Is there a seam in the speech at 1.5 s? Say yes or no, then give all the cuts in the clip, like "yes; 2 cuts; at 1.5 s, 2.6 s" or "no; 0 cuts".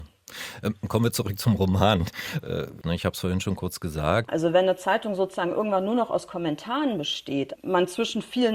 no; 3 cuts; at 2.8 s, 4.3 s, 7.6 s